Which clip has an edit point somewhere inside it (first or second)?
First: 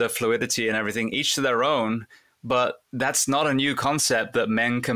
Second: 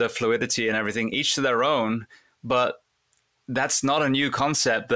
first